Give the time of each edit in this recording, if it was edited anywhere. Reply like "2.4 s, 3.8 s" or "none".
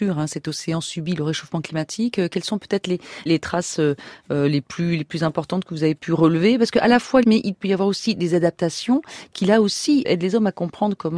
3.3 s, 7.2 s